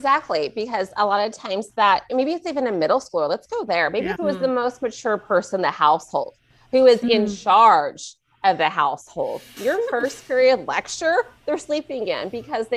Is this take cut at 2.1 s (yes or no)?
no